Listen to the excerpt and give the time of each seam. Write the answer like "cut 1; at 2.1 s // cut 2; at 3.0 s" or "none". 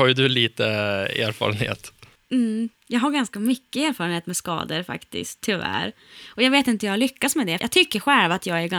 cut 1; at 2.8 s // cut 2; at 7.6 s